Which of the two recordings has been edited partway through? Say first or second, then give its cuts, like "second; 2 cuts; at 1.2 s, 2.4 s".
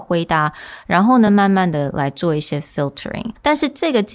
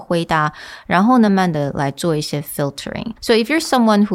second; 2 cuts; at 1.3 s, 3.2 s